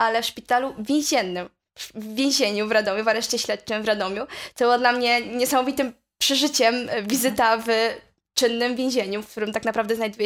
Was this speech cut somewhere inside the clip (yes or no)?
no